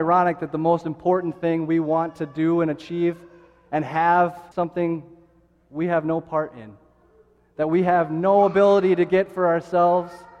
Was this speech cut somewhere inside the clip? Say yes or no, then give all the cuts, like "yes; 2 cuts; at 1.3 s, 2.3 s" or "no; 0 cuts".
yes; 1 cut; at 4.5 s